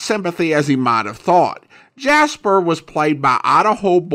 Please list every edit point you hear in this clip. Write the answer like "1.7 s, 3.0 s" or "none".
none